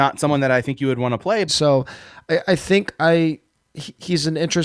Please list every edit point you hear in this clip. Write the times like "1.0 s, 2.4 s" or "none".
1.5 s